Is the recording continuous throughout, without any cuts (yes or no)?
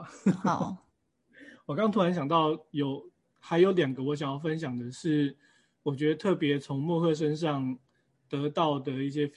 yes